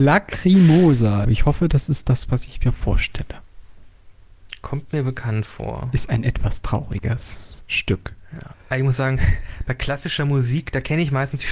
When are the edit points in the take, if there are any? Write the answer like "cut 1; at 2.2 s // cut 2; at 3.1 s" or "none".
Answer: cut 1; at 1.2 s // cut 2; at 8.5 s

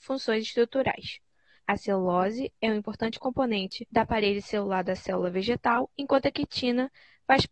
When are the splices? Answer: cut 1; at 1.6 s // cut 2; at 3.9 s

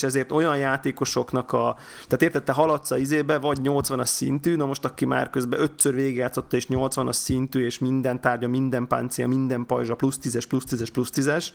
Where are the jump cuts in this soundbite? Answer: none

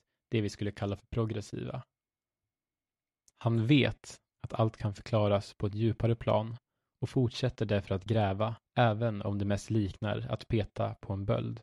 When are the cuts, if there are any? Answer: cut 1; at 3.2 s // cut 2; at 8.7 s

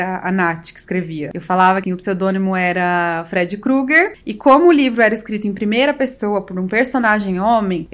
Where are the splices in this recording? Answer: cut 1; at 1.8 s // cut 2; at 4.1 s

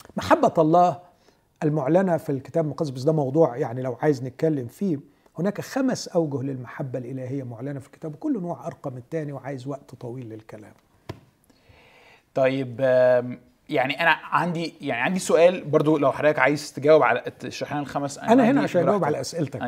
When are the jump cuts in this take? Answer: none

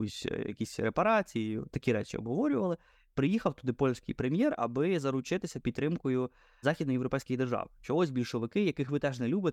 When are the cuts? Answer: cut 1; at 6.6 s // cut 2; at 7.8 s

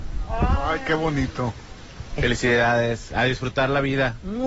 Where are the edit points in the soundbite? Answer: cut 1; at 2.2 s

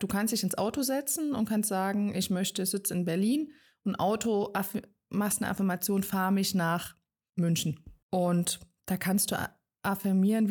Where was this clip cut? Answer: cut 1; at 8.0 s

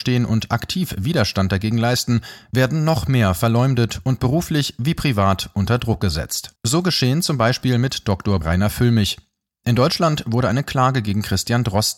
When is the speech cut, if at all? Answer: cut 1; at 6.6 s // cut 2; at 8.4 s

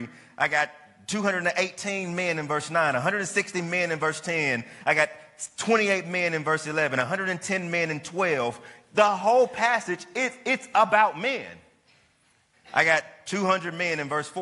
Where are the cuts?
cut 1; at 12.5 s

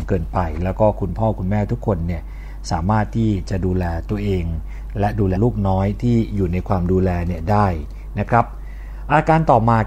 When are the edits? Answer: cut 1; at 5.4 s

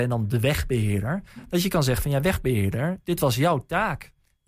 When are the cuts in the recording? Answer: none

